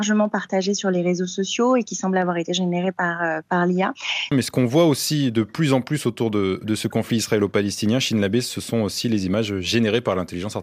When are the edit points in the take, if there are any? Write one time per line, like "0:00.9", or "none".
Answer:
0:04.3